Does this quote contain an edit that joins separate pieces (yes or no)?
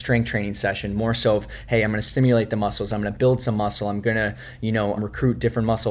yes